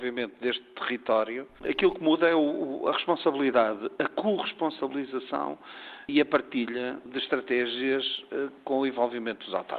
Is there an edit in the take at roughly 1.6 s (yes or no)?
yes